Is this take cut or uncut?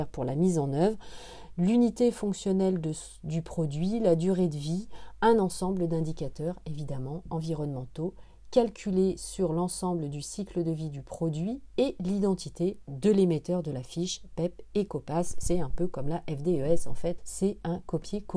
cut